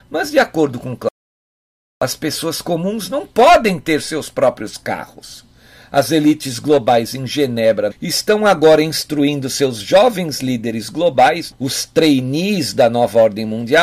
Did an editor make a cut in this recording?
yes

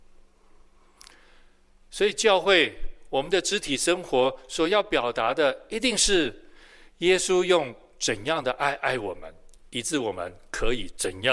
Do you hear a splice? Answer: no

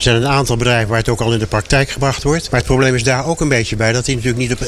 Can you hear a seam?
yes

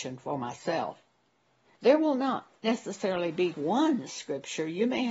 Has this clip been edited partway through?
yes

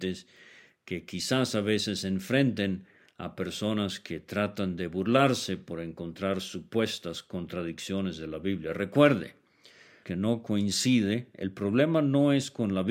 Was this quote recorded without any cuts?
no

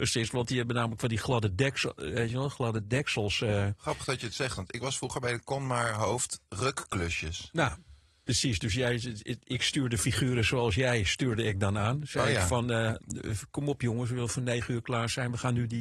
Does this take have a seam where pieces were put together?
no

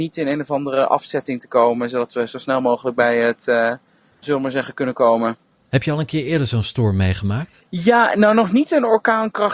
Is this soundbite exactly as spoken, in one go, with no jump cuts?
no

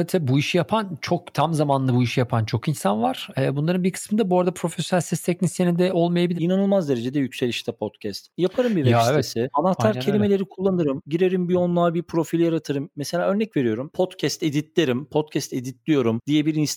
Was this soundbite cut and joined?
yes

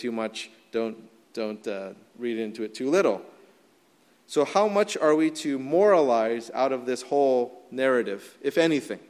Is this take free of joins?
yes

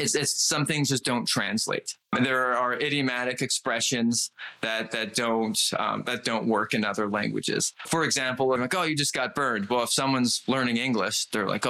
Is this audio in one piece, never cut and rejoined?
no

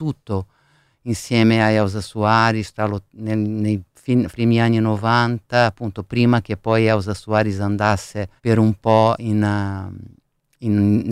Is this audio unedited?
no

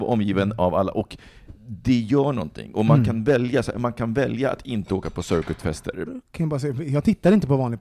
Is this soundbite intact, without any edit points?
no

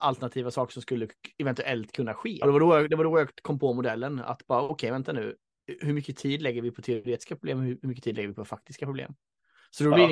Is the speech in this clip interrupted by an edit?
yes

